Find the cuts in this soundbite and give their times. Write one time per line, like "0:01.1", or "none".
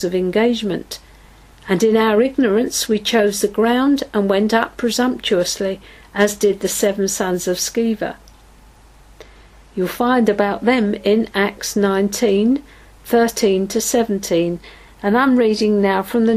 none